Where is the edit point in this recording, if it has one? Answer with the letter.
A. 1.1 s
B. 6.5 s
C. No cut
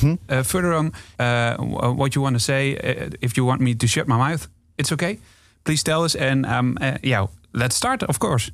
A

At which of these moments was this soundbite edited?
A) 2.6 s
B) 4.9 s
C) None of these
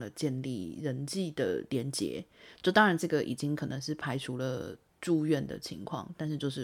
C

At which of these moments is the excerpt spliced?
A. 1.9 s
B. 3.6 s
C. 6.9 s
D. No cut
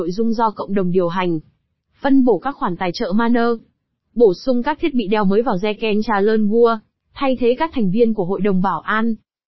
C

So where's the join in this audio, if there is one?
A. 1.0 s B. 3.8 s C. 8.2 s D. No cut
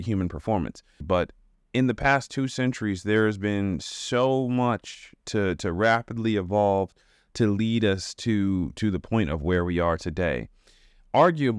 A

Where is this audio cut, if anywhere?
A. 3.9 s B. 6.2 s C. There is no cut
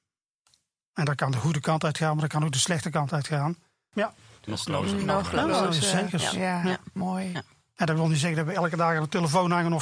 A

